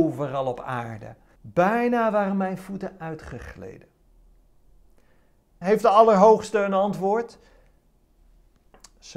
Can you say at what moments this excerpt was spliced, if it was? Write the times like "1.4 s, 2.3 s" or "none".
1.4 s, 5.6 s